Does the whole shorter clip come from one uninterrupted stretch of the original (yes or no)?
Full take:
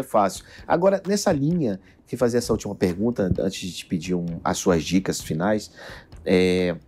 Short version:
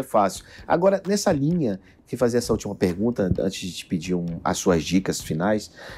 yes